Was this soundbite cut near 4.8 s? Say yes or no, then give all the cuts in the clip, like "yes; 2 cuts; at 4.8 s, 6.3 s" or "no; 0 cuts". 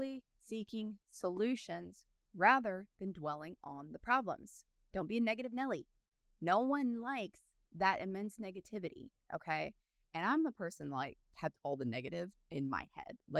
no; 0 cuts